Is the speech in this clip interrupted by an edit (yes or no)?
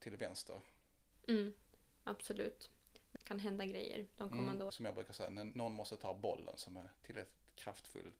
yes